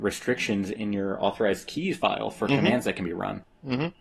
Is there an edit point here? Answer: no; 0 cuts

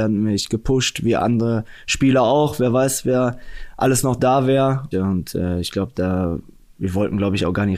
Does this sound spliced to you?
yes; 1 cut; at 4.9 s

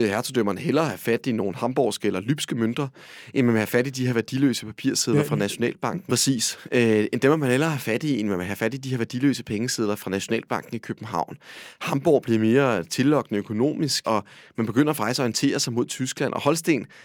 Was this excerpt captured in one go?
no; 2 cuts; at 6.1 s, 14.0 s

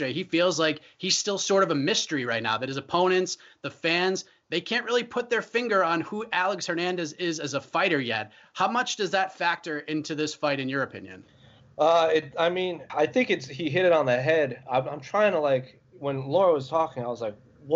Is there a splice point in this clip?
yes; 1 cut; at 12.9 s

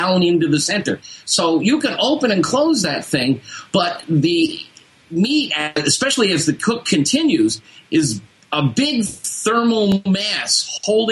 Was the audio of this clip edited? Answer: no; 0 cuts

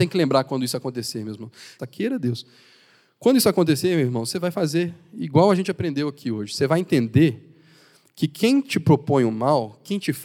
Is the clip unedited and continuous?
no; 1 cut; at 1.8 s

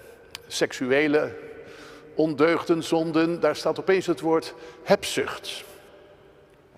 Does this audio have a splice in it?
no; 0 cuts

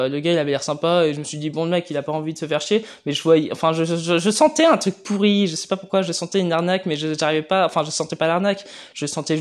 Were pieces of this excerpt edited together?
no; 0 cuts

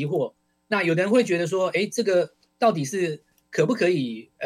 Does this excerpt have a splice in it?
no; 0 cuts

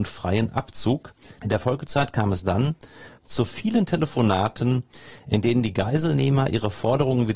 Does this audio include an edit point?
yes; 2 cuts; at 1.4 s, 3.2 s

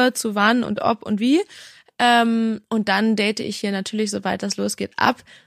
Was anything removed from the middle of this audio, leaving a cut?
no; 0 cuts

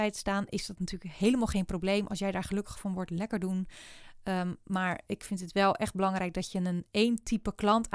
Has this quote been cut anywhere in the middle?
no; 0 cuts

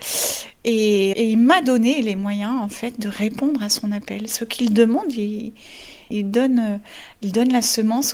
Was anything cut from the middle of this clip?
yes; 1 cut; at 1.1 s

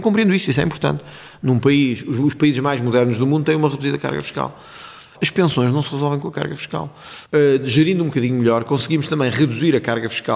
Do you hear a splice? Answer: yes; 2 cuts; at 5.1 s, 7.2 s

